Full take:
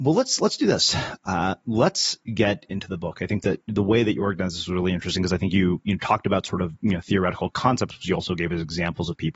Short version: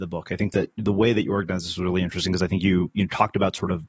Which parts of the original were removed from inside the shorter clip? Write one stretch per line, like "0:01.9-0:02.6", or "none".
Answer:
none